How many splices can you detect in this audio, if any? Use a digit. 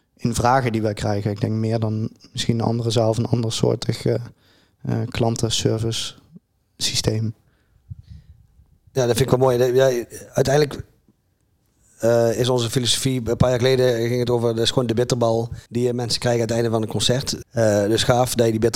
2